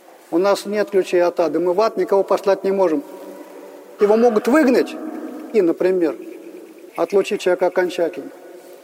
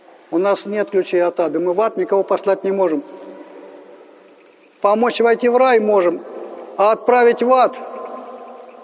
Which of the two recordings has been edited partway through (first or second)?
first